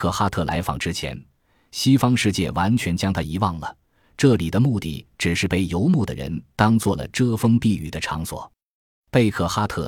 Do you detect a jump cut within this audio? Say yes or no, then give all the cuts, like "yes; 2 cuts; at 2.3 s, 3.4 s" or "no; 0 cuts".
no; 0 cuts